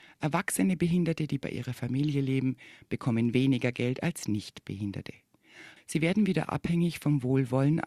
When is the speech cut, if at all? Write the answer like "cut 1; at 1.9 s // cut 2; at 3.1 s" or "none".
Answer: cut 1; at 5.8 s